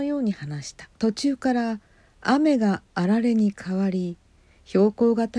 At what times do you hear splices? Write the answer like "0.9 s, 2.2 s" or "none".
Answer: 1.0 s

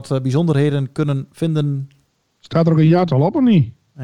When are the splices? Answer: none

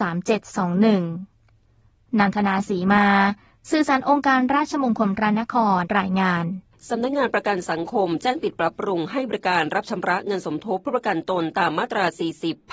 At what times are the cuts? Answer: 5.8 s

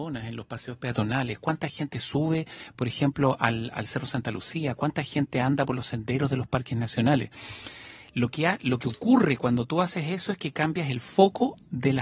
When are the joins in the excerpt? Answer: none

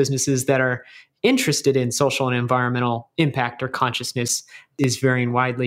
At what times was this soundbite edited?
none

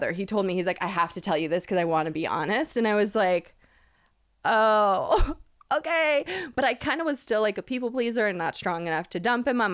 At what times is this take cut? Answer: none

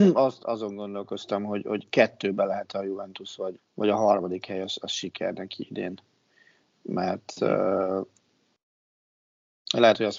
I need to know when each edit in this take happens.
3.6 s

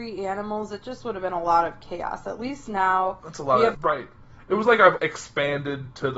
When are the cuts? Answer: 3.7 s, 5.0 s

